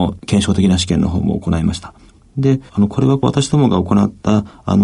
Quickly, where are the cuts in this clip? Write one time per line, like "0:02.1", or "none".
0:02.7